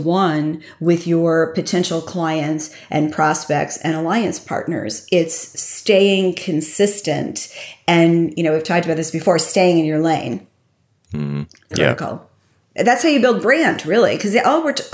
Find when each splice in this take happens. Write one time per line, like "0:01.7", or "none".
0:11.7